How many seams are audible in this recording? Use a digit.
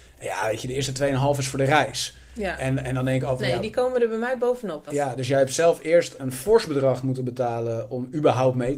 2